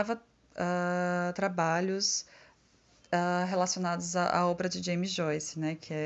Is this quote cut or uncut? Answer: uncut